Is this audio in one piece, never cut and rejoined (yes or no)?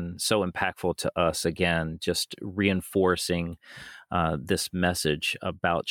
yes